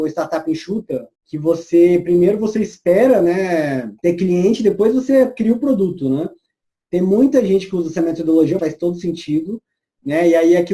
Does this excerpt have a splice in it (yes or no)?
yes